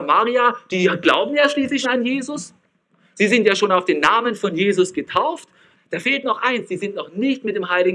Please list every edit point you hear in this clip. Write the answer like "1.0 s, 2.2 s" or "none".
1.8 s, 5.8 s